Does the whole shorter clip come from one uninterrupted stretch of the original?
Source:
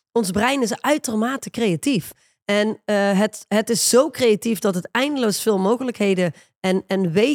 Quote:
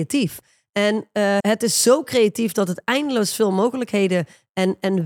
no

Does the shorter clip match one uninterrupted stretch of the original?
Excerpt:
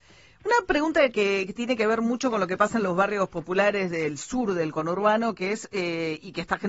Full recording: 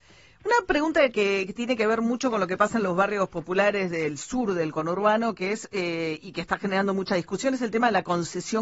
yes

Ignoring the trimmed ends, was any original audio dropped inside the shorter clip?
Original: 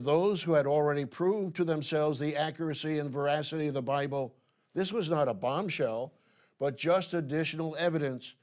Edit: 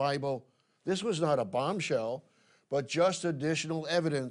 no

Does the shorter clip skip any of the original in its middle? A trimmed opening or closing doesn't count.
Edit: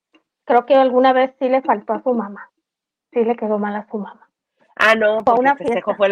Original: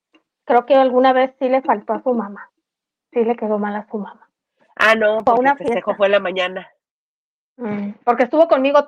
no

